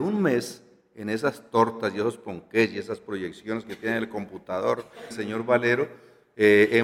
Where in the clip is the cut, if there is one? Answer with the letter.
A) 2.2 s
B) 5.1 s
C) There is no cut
B